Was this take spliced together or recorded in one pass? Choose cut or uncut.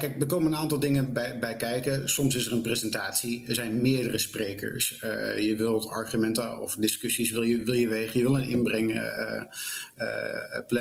uncut